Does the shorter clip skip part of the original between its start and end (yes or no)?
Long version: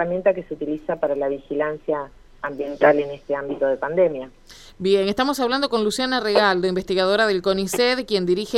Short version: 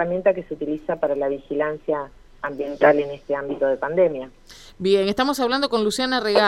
no